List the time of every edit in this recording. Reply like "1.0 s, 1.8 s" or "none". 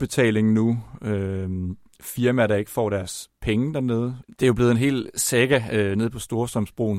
4.2 s